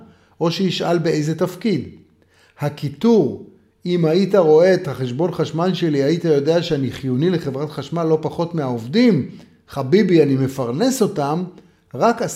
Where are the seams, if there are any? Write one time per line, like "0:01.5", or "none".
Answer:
none